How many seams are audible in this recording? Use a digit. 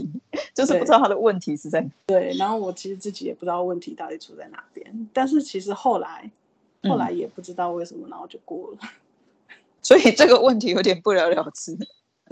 1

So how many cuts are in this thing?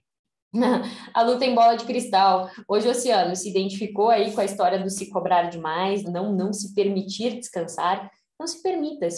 1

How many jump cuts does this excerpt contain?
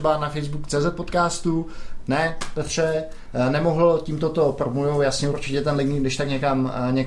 1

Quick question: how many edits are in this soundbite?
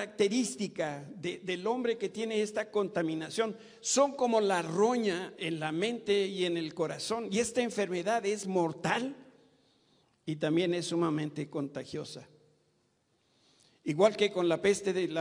0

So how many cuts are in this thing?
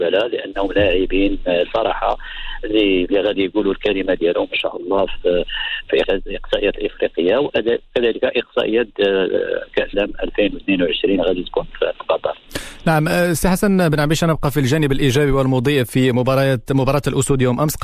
2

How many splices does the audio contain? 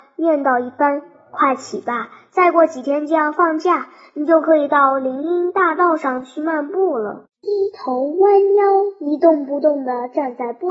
1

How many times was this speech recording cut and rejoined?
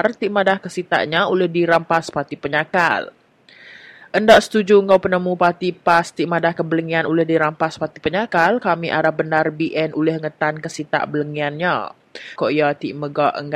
1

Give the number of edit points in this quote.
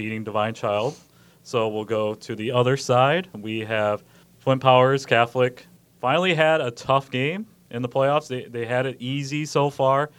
0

